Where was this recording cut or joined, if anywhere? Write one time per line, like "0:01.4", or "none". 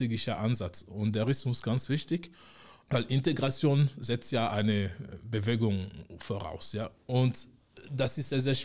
0:06.9